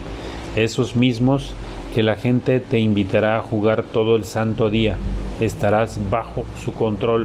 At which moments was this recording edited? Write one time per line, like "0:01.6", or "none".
none